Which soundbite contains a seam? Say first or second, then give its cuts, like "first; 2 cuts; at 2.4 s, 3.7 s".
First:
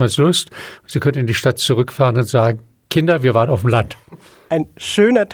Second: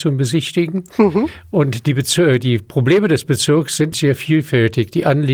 second; 1 cut; at 3.9 s